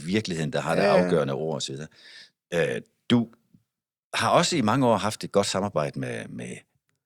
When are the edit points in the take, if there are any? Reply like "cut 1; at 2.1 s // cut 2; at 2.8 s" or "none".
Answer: none